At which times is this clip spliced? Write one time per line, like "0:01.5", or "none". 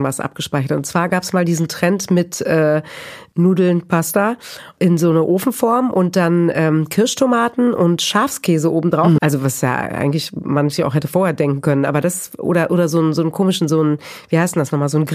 0:09.2

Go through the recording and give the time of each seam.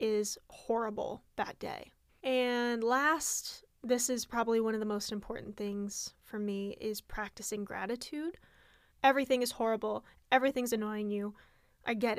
0:02.1
0:08.9
0:10.2

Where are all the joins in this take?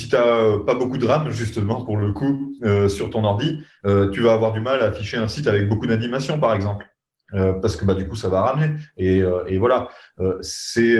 none

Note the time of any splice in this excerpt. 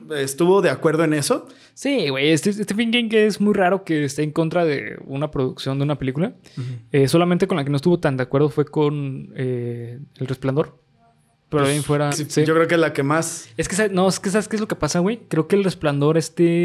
0:12.1

